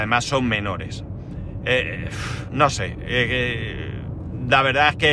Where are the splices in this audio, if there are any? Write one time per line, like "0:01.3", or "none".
none